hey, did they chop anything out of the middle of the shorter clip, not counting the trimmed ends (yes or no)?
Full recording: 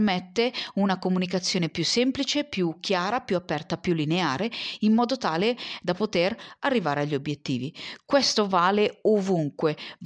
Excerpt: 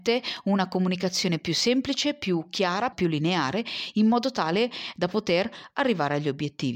yes